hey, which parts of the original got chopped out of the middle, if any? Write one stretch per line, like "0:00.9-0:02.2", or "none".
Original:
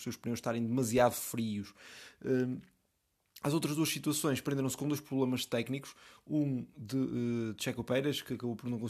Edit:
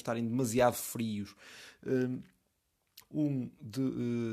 0:03.4-0:06.2

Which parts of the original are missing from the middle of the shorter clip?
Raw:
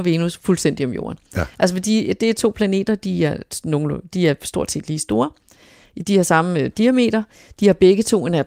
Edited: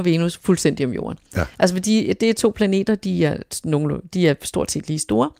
none

